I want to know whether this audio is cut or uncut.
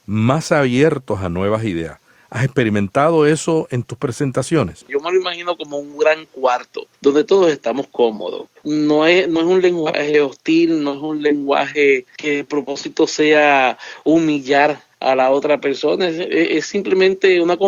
cut